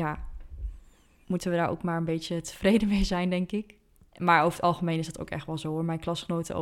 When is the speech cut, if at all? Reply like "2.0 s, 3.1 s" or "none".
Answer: none